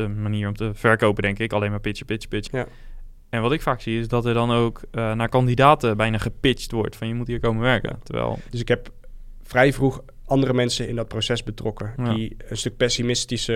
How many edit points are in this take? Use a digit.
2